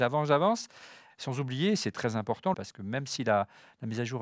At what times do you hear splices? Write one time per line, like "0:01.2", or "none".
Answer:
0:01.1
0:02.5